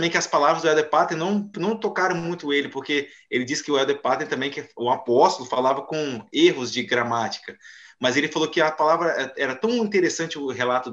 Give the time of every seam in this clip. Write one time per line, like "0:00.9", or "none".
0:01.5